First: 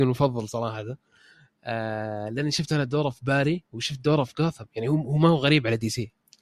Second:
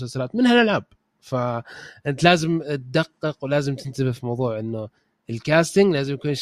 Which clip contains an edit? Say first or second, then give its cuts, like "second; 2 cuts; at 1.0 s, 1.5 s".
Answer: first; 1 cut; at 3.7 s